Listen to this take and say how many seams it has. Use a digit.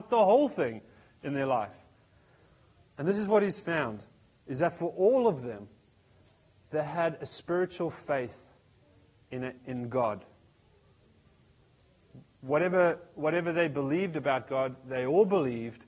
1